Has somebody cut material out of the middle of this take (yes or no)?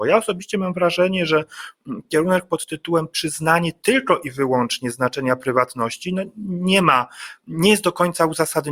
no